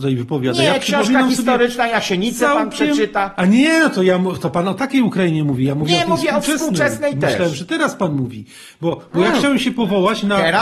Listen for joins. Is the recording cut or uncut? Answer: uncut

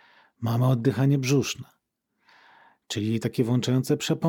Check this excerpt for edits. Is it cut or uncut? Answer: uncut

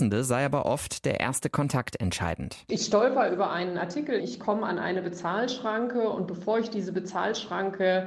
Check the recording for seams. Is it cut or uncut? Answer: cut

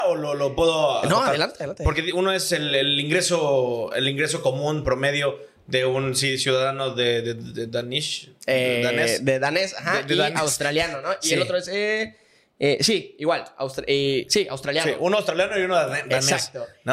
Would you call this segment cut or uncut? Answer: uncut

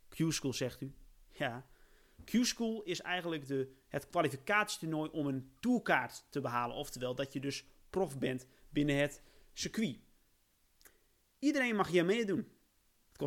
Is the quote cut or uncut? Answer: uncut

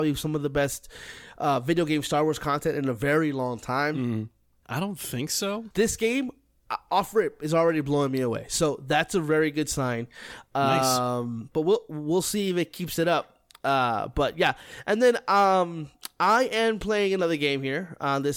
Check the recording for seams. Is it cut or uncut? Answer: cut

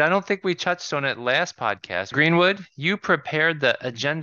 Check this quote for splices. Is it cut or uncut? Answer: cut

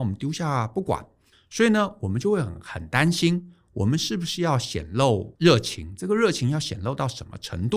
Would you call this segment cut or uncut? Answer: uncut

